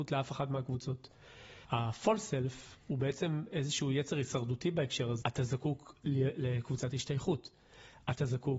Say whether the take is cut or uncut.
cut